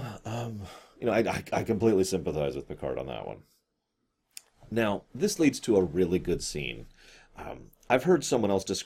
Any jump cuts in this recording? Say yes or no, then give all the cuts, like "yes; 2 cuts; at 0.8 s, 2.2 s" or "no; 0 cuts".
no; 0 cuts